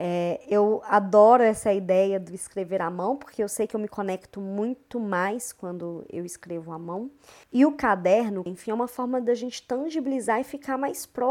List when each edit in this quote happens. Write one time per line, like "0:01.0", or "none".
0:07.4
0:08.5